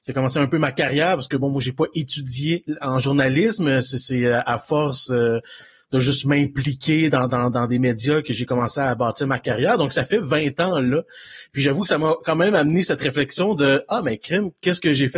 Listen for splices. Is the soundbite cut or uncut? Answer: uncut